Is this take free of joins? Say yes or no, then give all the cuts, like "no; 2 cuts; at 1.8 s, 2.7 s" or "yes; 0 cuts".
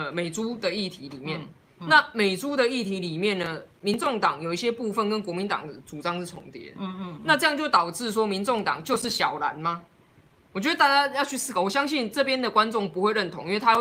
yes; 0 cuts